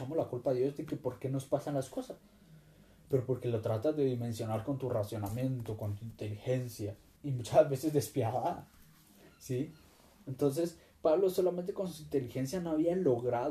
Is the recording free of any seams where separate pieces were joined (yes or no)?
no